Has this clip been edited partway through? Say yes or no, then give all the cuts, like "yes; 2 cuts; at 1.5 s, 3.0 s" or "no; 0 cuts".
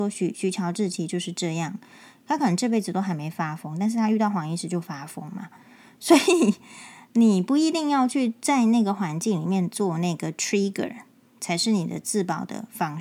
no; 0 cuts